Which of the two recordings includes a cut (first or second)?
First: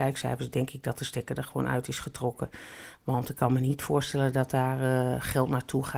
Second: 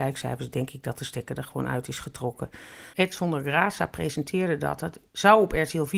second